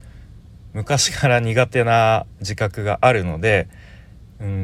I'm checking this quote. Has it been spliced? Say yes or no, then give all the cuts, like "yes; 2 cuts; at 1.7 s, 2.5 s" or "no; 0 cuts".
no; 0 cuts